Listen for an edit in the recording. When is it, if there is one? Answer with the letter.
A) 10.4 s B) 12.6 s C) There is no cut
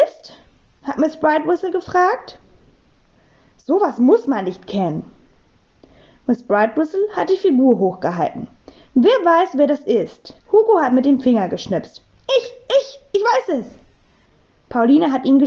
A